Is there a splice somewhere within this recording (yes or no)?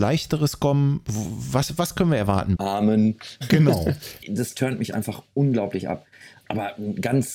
yes